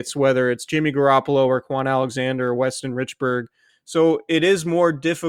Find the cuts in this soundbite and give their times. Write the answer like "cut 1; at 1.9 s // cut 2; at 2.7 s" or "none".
cut 1; at 3.7 s